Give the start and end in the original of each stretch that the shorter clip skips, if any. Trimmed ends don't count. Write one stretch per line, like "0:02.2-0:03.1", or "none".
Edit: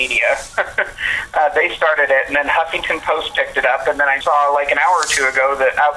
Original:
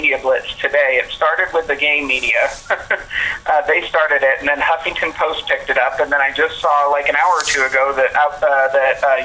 0:06.3-0:06.6